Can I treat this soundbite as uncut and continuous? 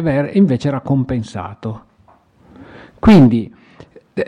yes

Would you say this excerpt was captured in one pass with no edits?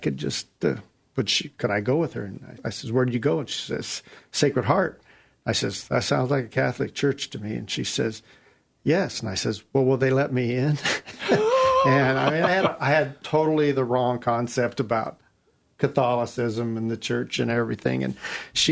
no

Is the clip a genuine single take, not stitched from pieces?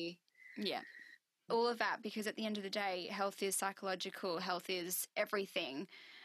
no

